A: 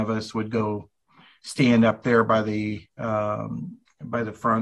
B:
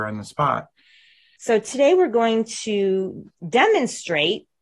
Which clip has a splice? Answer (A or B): B